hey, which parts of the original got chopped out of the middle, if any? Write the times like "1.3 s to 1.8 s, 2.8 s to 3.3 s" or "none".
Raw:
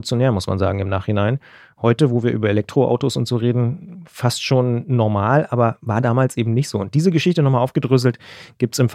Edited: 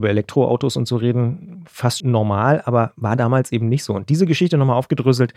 4.4 s to 4.9 s